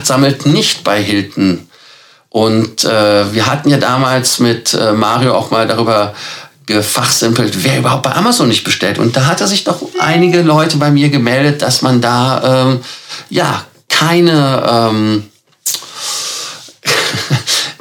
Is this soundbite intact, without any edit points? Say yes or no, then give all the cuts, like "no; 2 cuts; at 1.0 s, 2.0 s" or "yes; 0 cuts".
yes; 0 cuts